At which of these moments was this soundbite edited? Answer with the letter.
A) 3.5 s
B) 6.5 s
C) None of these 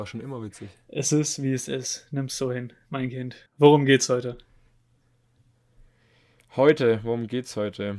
A